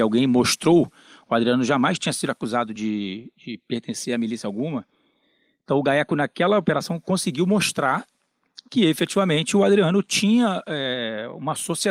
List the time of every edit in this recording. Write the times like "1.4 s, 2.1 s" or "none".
none